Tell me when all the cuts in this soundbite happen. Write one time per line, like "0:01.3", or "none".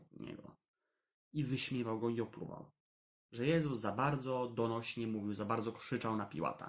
0:03.1